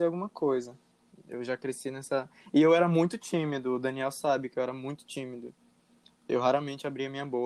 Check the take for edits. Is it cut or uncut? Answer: cut